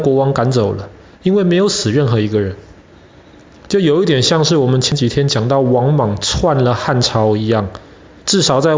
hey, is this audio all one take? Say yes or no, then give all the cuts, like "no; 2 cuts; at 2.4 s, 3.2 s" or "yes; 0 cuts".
no; 1 cut; at 1.1 s